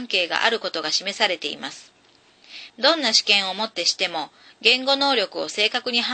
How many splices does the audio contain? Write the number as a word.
one